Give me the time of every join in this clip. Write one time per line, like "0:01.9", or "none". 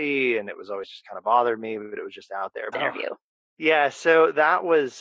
0:02.7

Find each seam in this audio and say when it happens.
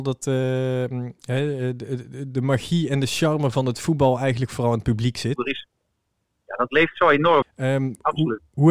0:05.4
0:07.4

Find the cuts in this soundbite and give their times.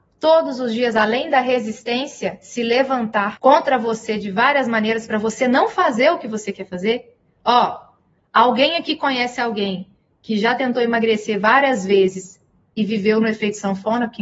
none

